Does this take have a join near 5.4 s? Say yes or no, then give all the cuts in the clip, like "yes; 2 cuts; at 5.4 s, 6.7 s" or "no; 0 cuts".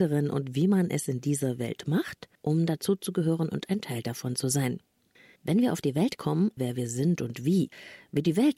yes; 3 cuts; at 2.3 s, 5.4 s, 6.6 s